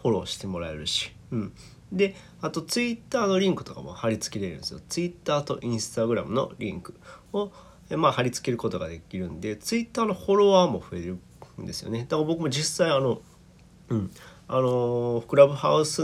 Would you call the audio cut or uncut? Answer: uncut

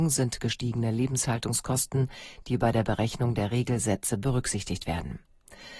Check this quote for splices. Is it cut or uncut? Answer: uncut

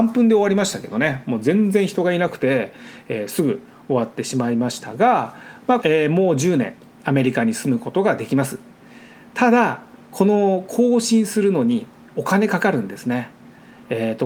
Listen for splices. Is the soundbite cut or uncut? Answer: cut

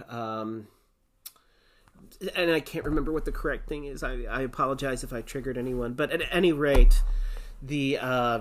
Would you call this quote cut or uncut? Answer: uncut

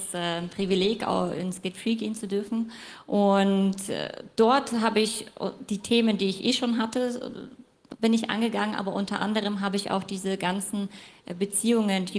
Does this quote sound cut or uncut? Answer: uncut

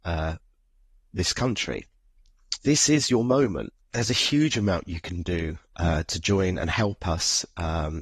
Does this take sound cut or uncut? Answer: cut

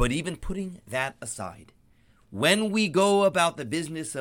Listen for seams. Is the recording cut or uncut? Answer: uncut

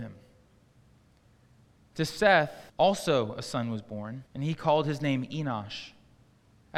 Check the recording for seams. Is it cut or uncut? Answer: cut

